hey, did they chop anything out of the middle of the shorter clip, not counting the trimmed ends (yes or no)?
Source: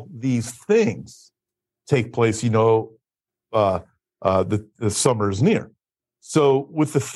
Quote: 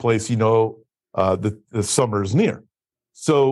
yes